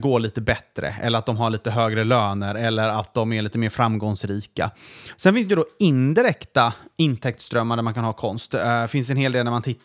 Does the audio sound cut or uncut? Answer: cut